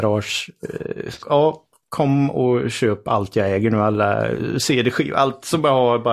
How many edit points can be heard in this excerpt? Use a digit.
1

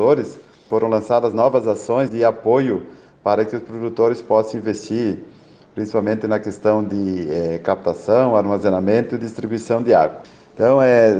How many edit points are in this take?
1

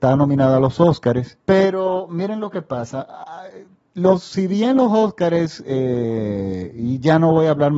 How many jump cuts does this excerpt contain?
1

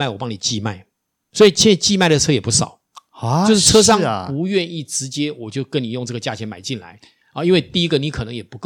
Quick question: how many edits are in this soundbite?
0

